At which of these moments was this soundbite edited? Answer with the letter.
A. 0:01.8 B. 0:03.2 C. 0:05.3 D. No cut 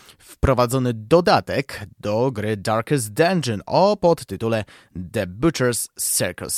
D